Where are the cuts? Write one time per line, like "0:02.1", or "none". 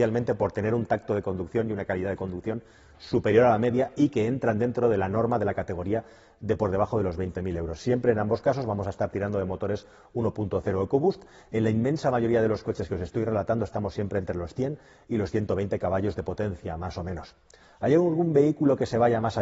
none